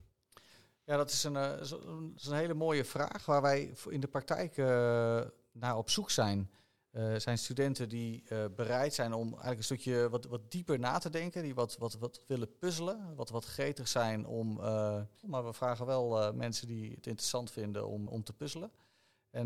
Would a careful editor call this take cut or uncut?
cut